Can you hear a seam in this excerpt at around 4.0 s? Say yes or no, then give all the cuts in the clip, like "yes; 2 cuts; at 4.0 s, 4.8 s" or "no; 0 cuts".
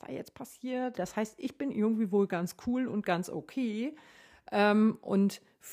no; 1 cut; at 0.9 s